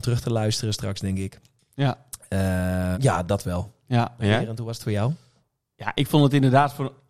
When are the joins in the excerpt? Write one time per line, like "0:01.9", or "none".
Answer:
0:02.9
0:04.2